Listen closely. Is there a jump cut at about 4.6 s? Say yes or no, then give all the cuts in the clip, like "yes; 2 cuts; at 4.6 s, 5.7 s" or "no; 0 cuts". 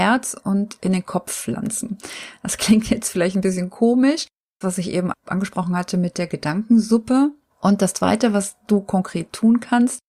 yes; 2 cuts; at 4.6 s, 7.5 s